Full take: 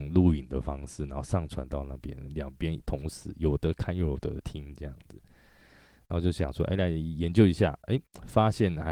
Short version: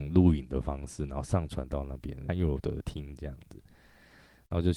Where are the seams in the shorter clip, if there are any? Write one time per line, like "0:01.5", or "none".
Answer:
0:02.3